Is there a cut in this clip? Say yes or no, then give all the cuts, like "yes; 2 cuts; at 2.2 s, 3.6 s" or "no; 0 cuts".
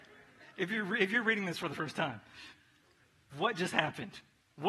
yes; 1 cut; at 3.3 s